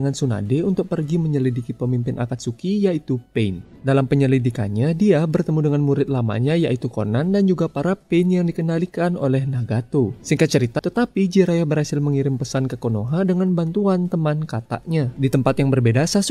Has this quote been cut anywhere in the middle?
yes; 1 cut; at 10.8 s

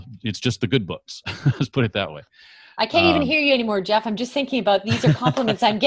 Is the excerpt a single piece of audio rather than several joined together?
yes; 0 cuts

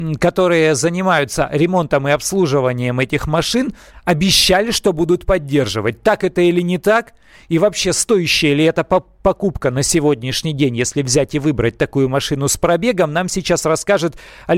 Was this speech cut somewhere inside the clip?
no; 0 cuts

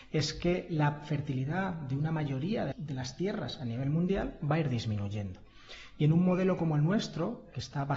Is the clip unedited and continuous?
no; 1 cut; at 2.7 s

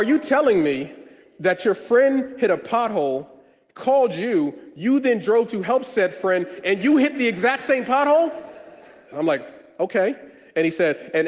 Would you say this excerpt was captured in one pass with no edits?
no; 1 cut; at 9.1 s

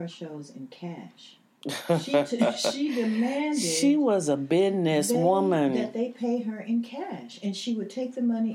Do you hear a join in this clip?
no; 0 cuts

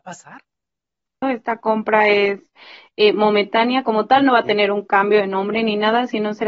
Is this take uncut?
no; 1 cut; at 1.2 s

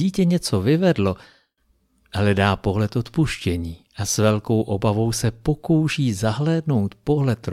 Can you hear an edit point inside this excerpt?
no; 0 cuts

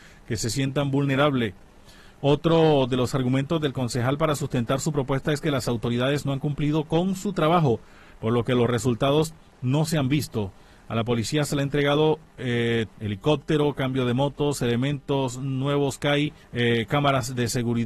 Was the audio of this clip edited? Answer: yes; 2 cuts; at 12.9 s, 16.4 s

